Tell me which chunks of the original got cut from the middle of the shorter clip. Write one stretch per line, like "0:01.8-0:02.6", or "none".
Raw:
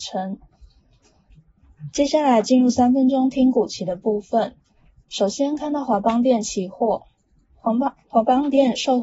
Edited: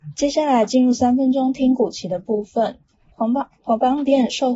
0:04.9-0:07.6